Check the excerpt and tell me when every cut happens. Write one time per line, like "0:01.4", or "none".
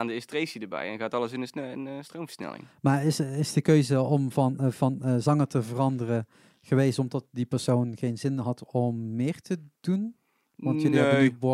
none